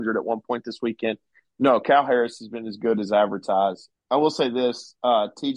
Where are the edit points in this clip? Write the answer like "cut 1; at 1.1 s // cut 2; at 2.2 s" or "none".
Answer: cut 1; at 3.9 s